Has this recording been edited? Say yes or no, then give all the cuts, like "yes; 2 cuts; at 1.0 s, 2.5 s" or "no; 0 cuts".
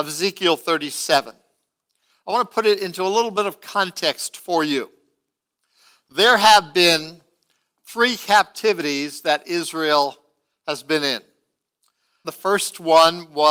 yes; 1 cut; at 12.2 s